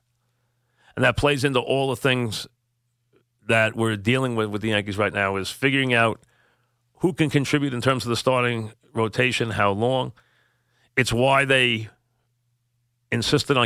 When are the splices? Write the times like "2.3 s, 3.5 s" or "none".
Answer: none